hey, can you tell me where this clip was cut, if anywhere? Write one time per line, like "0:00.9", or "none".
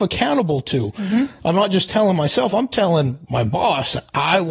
none